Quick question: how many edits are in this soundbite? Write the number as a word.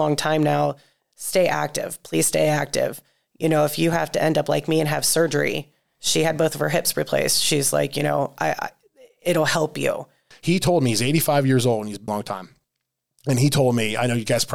two